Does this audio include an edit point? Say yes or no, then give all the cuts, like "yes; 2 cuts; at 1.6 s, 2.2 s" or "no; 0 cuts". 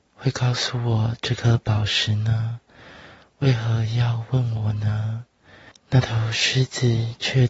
yes; 1 cut; at 5.7 s